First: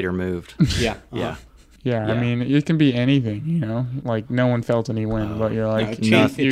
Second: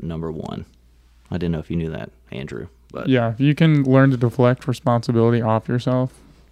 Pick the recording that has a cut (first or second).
first